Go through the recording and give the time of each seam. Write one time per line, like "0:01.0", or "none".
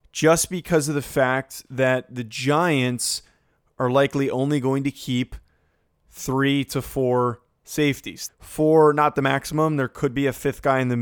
0:08.3